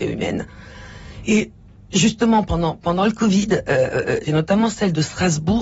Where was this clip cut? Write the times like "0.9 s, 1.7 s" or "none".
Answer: 4.2 s